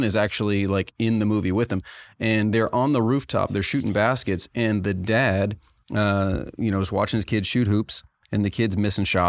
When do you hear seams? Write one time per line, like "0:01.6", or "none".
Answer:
none